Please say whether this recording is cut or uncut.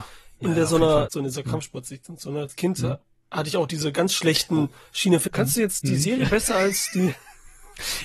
cut